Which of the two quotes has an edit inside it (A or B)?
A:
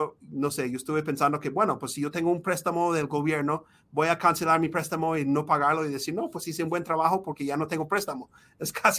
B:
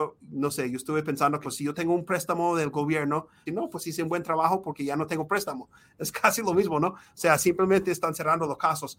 B